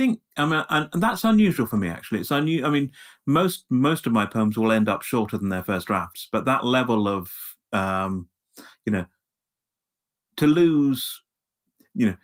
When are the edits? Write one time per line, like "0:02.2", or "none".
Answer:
none